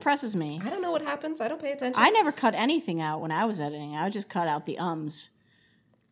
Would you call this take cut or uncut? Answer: uncut